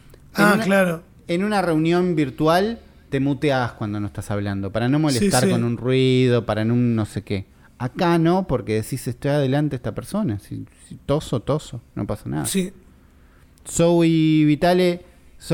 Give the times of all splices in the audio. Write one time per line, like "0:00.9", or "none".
none